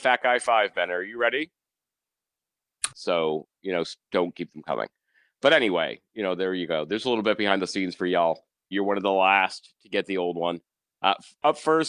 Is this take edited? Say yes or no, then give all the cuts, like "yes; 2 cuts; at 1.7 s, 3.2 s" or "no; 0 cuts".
yes; 2 cuts; at 2.9 s, 8.7 s